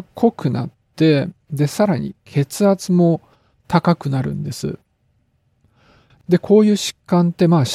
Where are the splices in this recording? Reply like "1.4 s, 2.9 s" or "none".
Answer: 6.1 s